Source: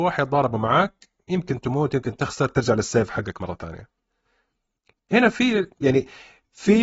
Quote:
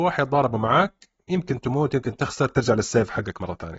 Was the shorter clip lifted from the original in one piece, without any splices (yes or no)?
yes